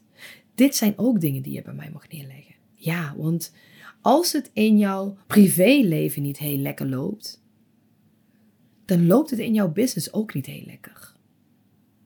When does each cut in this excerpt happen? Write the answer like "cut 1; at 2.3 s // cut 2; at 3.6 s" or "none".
cut 1; at 2.5 s // cut 2; at 5.2 s